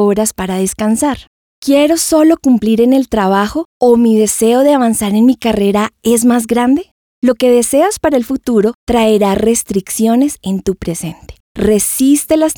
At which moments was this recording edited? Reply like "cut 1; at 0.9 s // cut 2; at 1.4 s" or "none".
cut 1; at 11.4 s